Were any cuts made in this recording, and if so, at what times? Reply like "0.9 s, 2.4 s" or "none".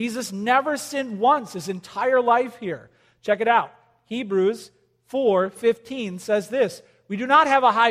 none